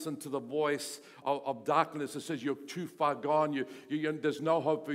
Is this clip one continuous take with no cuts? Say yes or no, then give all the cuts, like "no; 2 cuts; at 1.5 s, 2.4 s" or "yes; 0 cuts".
no; 1 cut; at 1.2 s